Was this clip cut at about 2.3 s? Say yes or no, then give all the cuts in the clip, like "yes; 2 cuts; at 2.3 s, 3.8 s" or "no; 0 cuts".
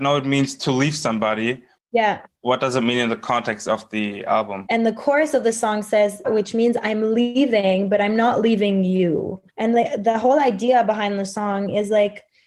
no; 3 cuts; at 4.7 s, 6.2 s, 9.5 s